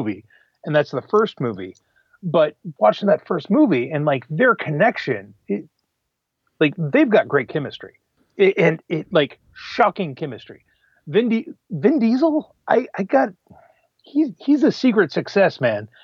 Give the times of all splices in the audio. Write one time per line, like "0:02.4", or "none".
0:02.8